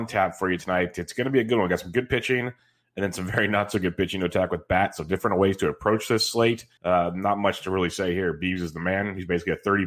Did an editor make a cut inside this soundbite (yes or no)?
yes